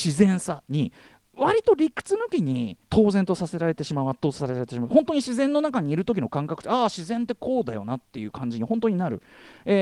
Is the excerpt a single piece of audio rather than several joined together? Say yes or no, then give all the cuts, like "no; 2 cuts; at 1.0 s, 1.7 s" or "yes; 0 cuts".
no; 1 cut; at 2.8 s